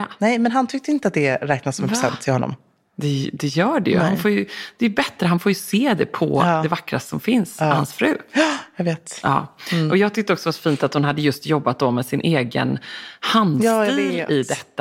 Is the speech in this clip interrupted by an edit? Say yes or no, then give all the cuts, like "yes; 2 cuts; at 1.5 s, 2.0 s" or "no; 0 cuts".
no; 0 cuts